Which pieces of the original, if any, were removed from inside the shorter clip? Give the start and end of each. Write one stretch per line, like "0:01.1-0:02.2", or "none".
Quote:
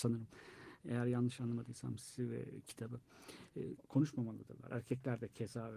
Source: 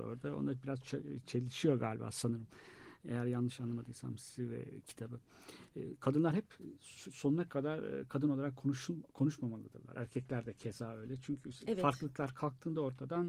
0:06.0-0:09.0